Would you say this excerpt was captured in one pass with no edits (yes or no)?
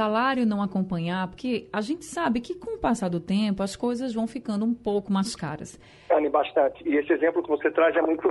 no